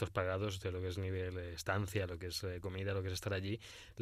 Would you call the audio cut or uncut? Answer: uncut